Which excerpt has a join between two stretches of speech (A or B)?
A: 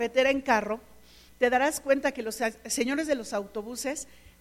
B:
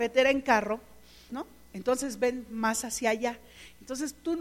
B